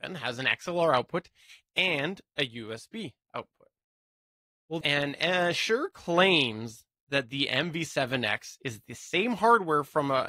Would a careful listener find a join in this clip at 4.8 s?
yes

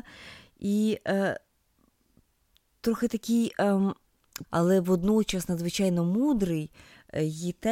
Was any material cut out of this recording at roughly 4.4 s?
yes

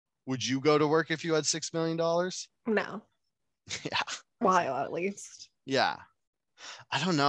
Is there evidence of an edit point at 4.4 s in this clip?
yes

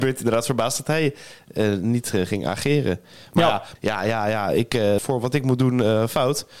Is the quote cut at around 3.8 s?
yes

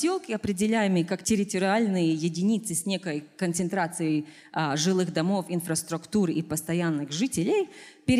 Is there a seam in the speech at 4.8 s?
no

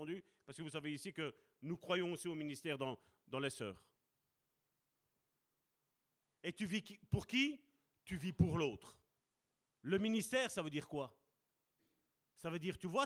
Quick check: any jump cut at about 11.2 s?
no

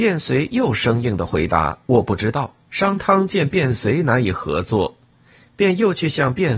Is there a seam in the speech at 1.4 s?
no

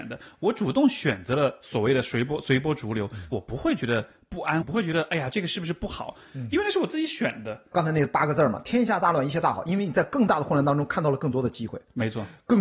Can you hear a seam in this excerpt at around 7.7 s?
yes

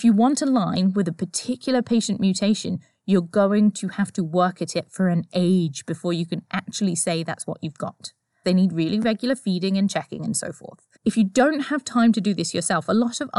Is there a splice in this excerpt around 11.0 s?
yes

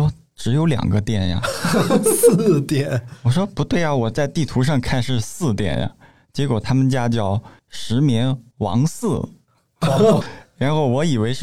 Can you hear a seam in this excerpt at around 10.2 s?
yes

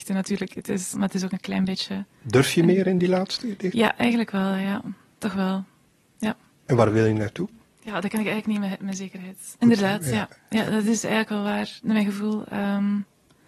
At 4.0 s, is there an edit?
no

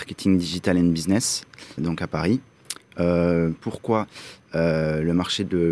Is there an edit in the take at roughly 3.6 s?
yes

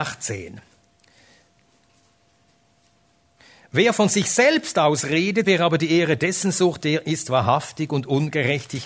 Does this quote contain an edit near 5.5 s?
yes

